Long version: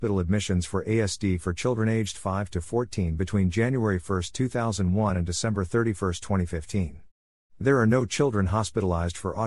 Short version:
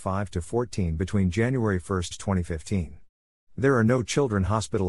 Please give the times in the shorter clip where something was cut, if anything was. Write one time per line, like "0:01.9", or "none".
0:02.1